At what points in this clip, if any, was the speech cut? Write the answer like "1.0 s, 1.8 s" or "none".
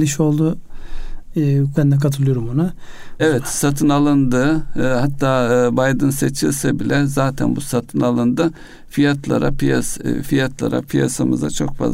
1.7 s, 3.2 s